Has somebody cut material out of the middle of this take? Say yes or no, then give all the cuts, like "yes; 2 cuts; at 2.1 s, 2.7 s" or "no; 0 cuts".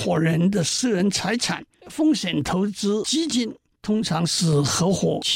yes; 1 cut; at 1.7 s